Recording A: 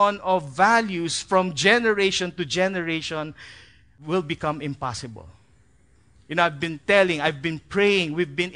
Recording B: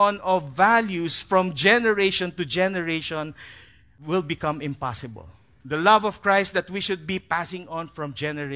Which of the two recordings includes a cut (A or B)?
B